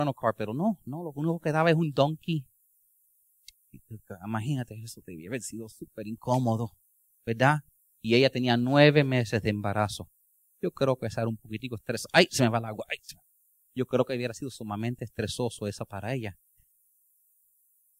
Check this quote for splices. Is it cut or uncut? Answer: uncut